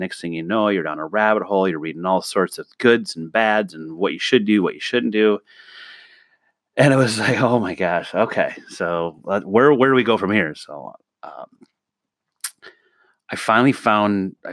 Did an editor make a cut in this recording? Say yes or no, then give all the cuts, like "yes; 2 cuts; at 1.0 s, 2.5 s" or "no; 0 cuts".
no; 0 cuts